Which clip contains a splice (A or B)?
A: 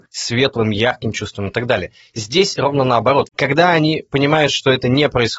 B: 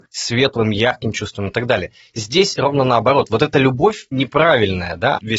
A